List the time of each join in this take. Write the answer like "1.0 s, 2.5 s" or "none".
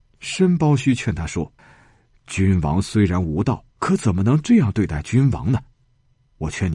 1.6 s, 3.7 s